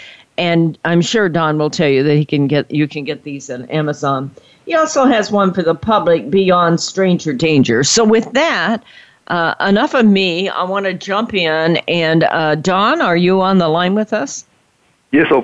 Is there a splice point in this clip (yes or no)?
no